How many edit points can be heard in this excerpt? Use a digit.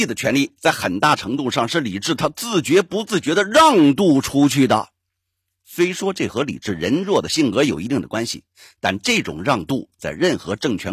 0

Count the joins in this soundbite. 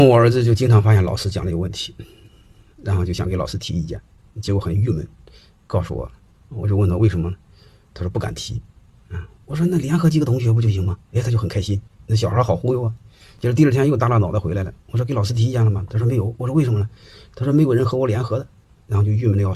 0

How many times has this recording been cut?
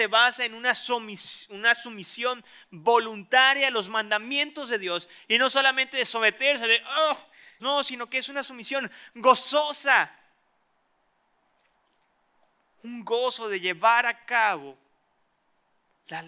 1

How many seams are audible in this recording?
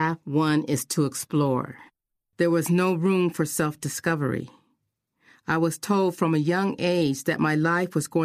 1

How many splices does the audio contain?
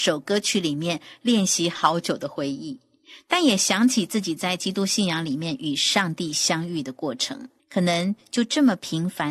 1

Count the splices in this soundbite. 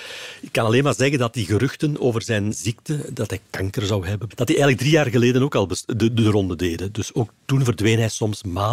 1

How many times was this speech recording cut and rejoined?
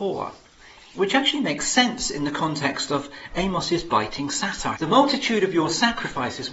1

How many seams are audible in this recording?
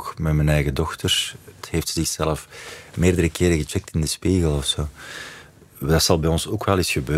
1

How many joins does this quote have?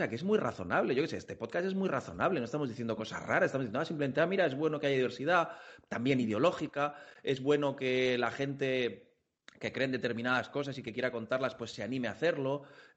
0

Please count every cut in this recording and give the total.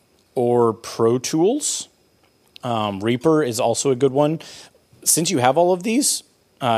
0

